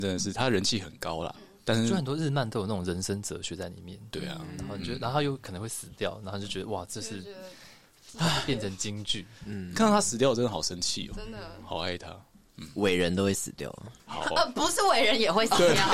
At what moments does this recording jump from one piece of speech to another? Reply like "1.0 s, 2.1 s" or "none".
14.0 s